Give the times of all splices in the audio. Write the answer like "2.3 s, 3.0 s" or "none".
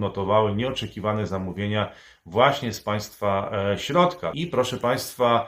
4.3 s